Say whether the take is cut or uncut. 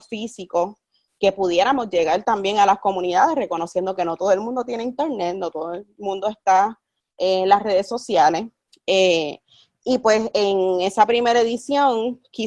uncut